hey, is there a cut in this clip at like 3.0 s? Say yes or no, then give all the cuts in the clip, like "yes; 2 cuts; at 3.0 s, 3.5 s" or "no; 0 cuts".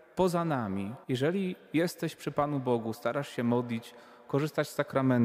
no; 1 cut; at 1.0 s